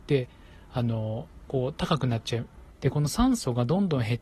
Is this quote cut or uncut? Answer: cut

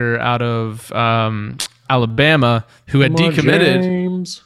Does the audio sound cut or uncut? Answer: uncut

